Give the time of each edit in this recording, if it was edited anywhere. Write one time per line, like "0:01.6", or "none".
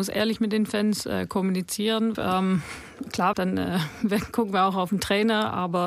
0:02.1
0:03.3